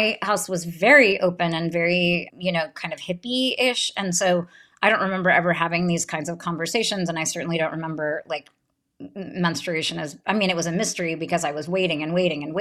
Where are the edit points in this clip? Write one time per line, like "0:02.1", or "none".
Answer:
0:02.3